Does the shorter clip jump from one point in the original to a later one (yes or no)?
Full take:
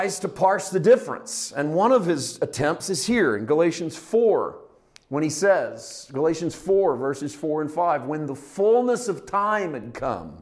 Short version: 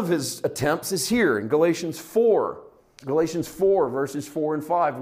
yes